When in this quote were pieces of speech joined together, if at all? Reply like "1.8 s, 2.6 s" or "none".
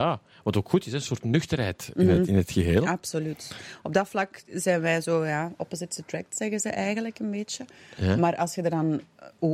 none